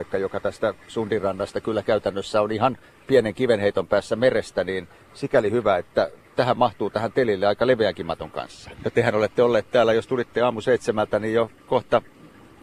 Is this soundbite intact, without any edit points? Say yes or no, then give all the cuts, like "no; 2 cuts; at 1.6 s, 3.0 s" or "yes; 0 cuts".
no; 1 cut; at 8.7 s